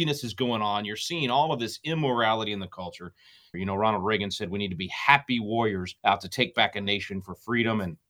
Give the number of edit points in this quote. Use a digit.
2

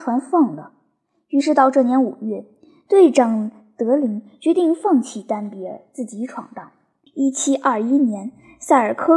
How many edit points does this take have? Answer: 1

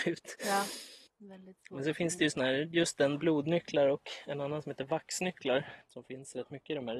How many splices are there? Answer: 1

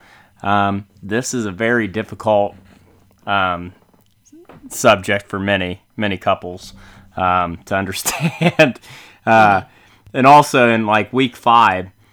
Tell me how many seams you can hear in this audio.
0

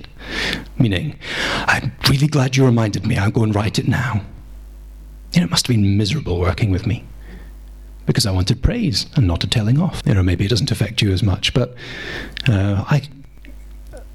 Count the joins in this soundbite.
1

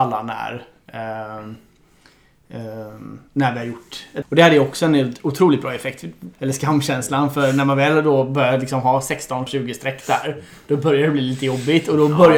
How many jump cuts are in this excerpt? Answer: 3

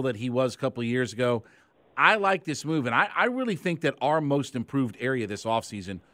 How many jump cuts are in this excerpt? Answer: 0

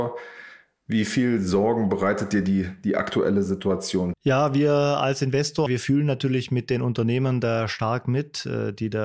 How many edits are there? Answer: 2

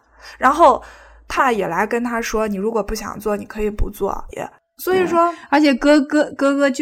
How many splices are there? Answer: 2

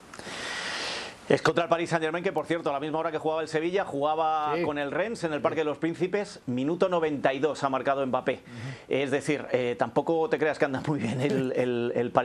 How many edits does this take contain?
0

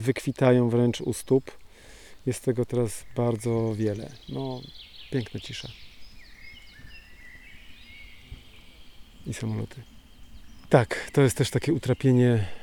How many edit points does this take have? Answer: 1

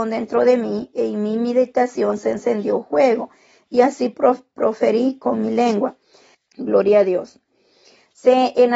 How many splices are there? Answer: 1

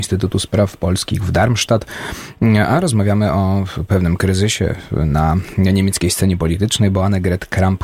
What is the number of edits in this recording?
0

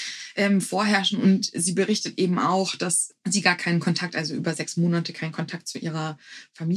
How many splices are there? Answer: 0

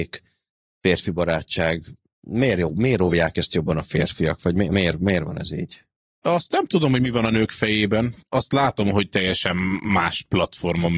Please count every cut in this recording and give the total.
0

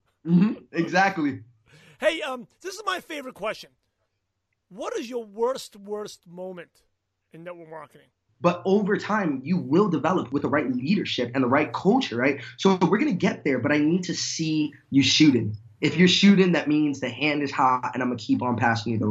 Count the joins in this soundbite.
1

